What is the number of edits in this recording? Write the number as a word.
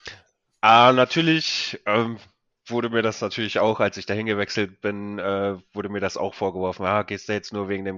zero